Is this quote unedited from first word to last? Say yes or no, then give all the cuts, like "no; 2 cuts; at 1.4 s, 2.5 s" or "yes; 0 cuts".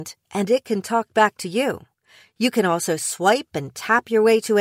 yes; 0 cuts